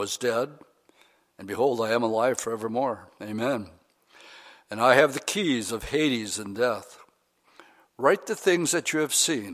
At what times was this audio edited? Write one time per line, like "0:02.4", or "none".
none